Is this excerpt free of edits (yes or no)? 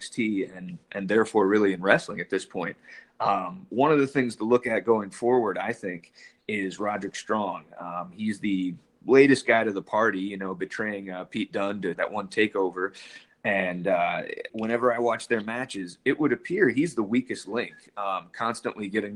no